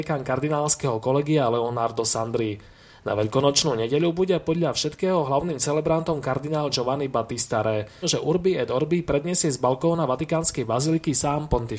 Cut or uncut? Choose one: cut